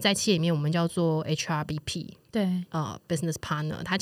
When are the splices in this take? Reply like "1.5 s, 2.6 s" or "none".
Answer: none